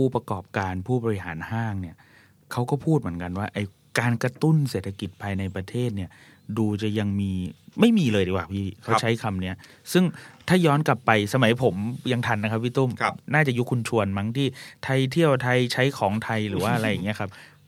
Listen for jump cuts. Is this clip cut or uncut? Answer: uncut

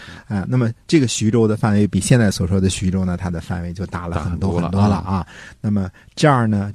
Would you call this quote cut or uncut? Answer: uncut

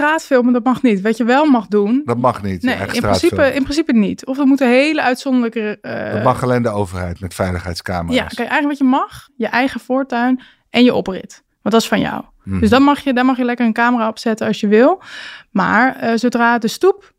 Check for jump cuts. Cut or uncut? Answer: uncut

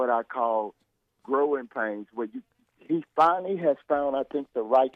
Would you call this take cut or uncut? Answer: uncut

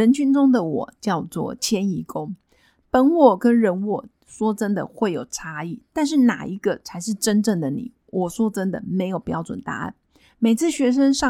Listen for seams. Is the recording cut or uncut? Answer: uncut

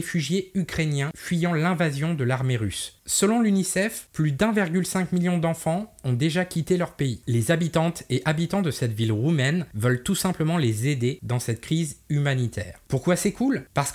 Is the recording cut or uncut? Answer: uncut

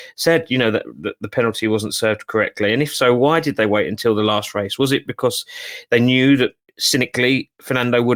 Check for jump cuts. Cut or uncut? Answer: uncut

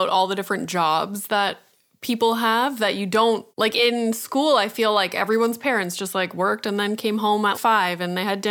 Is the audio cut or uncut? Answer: cut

